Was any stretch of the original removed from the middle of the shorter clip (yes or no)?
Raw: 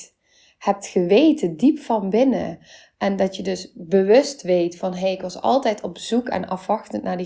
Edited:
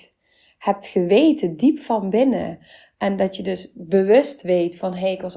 no